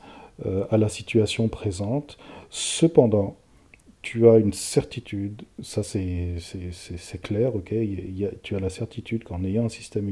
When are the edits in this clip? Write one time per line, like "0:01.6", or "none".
none